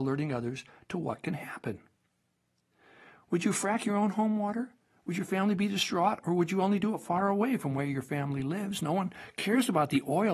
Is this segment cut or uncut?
uncut